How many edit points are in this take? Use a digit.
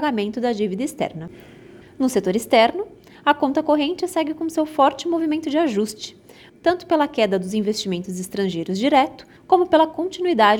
3